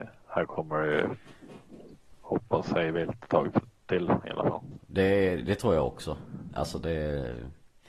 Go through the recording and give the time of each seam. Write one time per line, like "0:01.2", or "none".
0:04.8